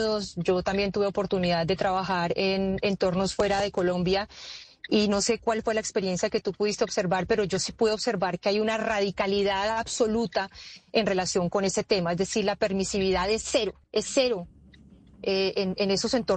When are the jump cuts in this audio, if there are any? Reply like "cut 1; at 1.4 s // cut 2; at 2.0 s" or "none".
cut 1; at 13.8 s